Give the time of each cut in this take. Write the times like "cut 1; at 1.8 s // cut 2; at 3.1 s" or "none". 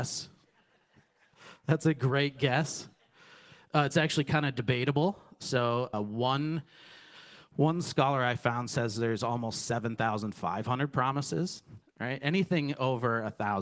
cut 1; at 5.9 s // cut 2; at 11.8 s